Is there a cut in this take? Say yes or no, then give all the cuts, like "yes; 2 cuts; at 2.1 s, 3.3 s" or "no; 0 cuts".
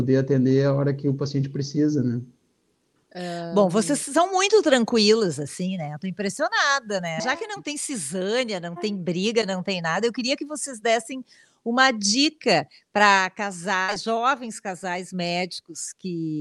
no; 0 cuts